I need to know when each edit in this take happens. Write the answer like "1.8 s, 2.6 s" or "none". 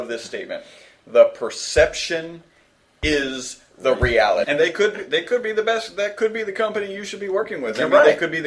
4.4 s